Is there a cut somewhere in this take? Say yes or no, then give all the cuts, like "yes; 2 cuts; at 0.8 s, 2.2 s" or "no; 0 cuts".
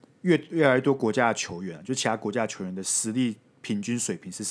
no; 0 cuts